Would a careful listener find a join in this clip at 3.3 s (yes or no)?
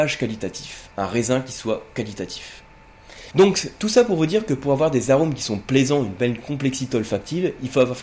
yes